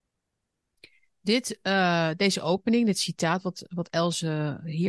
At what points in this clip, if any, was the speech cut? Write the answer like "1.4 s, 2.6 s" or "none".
none

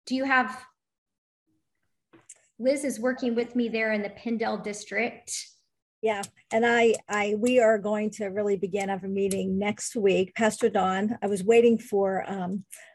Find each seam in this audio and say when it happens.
none

